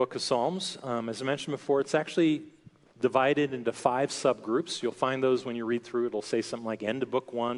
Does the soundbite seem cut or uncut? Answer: uncut